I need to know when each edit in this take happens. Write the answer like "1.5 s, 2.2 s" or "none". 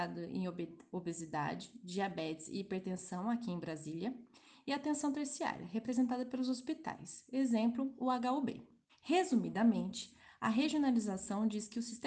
8.9 s